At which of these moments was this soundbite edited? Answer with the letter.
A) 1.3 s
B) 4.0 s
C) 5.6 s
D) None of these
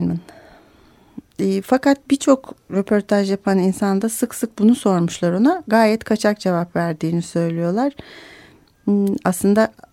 D